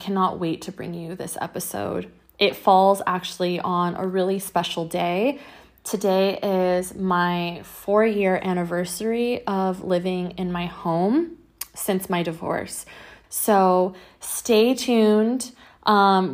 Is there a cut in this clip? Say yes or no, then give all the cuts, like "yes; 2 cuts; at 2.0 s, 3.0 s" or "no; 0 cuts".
yes; 1 cut; at 13.2 s